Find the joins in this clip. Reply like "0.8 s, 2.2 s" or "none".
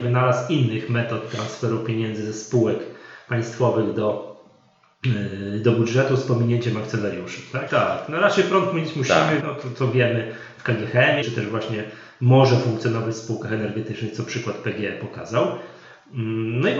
7.7 s, 9.4 s, 11.2 s

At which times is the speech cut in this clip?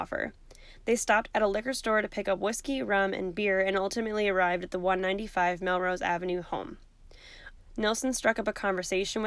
7.6 s

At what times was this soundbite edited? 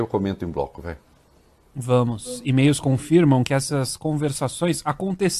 none

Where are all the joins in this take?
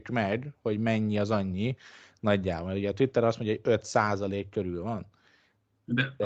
none

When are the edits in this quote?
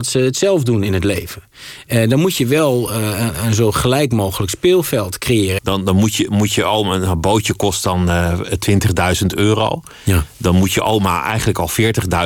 5.6 s

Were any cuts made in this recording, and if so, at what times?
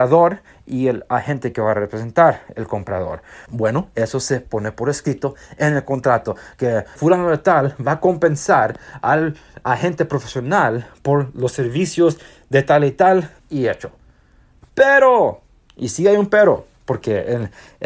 3.5 s, 14.6 s

